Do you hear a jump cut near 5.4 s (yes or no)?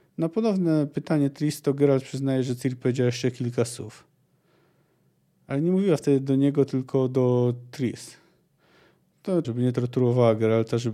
no